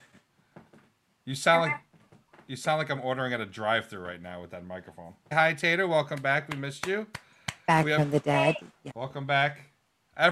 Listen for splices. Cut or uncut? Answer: cut